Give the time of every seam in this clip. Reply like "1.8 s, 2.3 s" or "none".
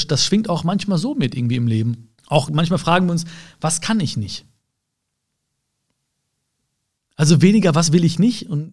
2.2 s, 7.0 s